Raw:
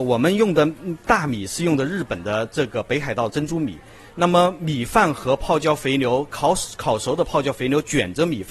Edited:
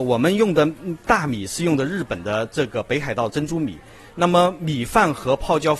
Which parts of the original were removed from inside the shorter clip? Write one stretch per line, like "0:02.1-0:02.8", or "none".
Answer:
none